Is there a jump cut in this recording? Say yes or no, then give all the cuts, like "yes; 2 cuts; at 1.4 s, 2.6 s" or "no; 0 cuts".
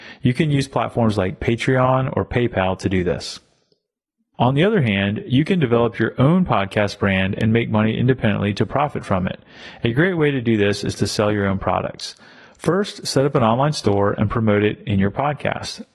yes; 1 cut; at 4.3 s